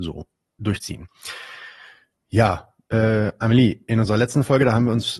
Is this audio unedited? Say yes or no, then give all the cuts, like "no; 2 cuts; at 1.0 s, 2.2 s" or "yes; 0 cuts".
yes; 0 cuts